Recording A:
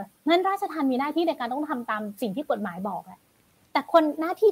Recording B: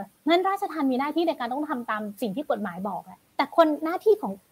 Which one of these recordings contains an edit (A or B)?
B